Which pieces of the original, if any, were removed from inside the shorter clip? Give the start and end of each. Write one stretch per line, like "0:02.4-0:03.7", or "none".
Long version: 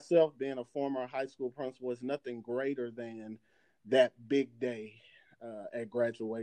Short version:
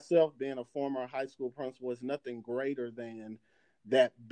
none